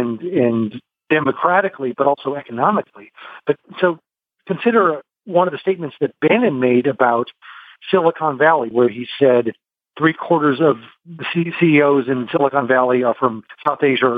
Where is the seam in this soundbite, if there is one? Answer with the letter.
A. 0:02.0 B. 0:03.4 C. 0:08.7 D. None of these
C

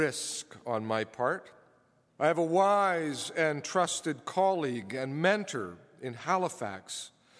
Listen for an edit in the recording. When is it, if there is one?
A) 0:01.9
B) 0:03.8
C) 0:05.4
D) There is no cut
D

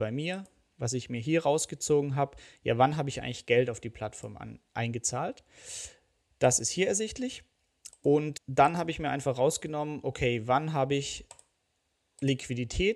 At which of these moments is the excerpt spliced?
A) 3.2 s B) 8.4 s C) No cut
B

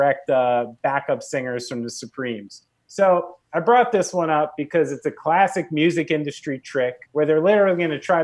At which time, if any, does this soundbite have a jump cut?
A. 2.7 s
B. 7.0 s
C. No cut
B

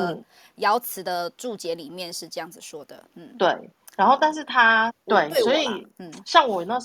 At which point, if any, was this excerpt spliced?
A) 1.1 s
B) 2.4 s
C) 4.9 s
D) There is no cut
C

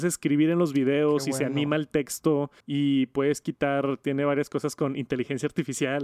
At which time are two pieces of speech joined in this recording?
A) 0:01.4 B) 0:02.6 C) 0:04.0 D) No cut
B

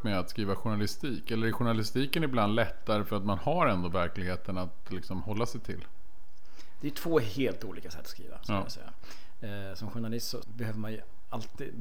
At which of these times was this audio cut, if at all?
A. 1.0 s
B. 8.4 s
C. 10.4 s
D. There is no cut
C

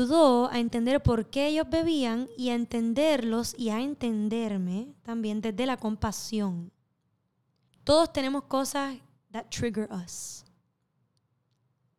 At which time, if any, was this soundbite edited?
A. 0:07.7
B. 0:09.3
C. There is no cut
A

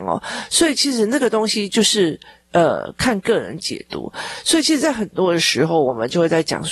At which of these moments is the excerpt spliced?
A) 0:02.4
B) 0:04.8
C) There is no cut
C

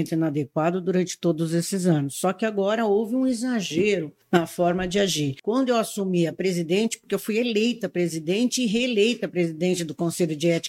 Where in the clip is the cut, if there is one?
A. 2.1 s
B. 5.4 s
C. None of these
C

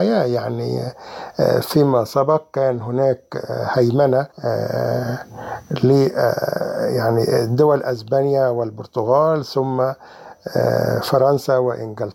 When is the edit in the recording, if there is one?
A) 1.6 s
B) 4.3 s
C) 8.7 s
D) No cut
B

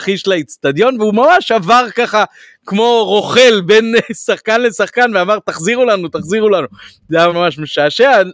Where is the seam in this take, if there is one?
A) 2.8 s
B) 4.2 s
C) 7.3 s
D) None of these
C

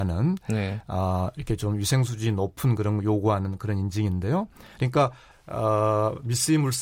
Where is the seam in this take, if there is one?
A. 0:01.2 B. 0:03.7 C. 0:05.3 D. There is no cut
C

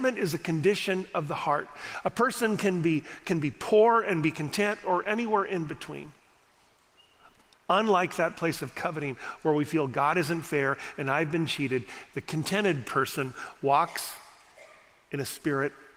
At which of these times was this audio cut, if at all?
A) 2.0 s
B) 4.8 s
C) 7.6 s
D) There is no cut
B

